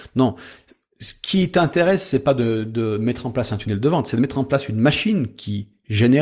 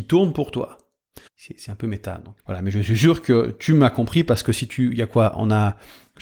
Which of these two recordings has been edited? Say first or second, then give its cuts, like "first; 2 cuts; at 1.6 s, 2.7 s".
second; 2 cuts; at 1.3 s, 2.4 s